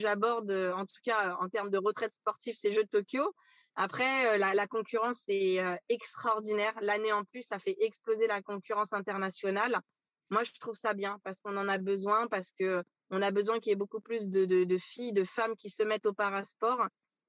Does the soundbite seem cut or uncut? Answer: uncut